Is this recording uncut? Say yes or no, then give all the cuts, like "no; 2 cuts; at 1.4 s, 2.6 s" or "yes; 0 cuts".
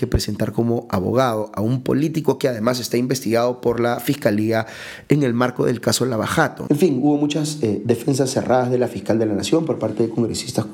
no; 1 cut; at 6.7 s